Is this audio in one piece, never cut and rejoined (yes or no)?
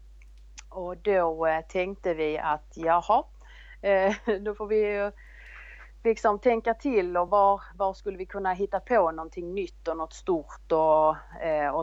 yes